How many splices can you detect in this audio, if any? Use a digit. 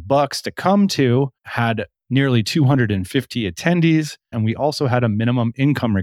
2